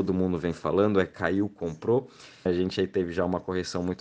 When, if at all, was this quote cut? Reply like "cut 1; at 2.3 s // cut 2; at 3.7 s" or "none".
cut 1; at 2.5 s